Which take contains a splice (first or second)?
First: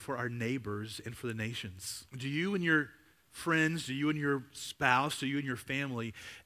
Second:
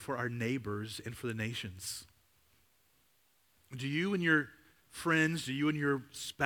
first